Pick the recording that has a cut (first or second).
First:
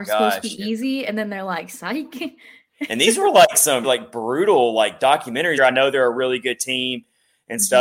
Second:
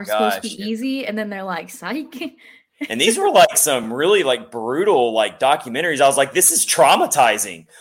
first